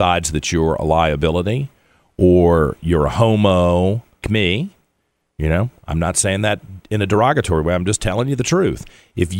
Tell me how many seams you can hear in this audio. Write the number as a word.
one